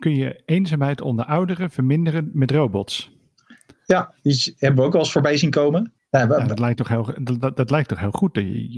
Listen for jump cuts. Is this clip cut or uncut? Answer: uncut